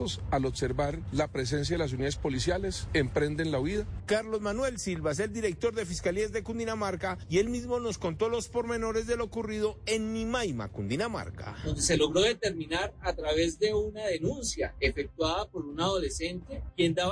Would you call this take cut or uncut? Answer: cut